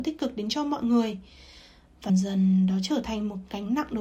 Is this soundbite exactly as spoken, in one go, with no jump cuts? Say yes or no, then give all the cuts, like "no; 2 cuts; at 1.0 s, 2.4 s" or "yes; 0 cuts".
no; 1 cut; at 2.1 s